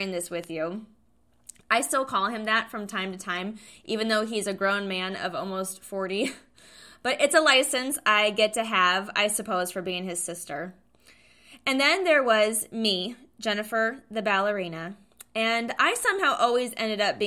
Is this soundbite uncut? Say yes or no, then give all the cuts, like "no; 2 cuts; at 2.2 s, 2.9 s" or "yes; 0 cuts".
yes; 0 cuts